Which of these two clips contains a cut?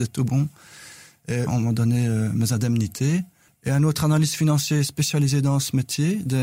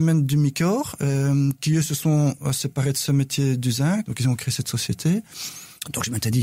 first; 2 cuts; at 1.5 s, 3.5 s

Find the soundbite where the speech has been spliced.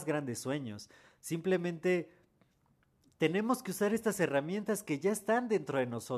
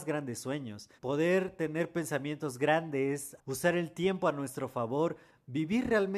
second; 2 cuts; at 1.0 s, 3.4 s

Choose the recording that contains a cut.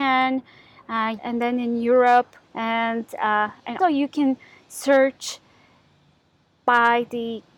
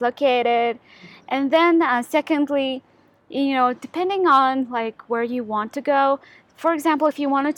first; 3 cuts; at 1.2 s, 2.4 s, 3.8 s

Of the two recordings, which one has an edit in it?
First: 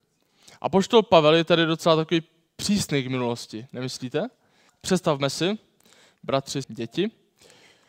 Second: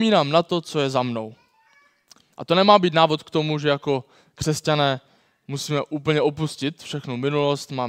first; 2 cuts; at 4.7 s, 6.6 s

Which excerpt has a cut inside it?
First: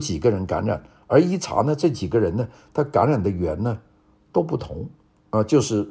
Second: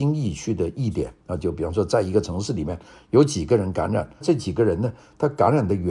second; 2 cuts; at 1.2 s, 4.2 s

